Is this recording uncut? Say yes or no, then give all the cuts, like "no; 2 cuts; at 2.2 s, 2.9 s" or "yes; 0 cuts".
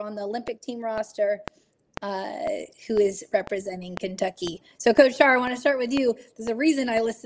no; 1 cut; at 1.9 s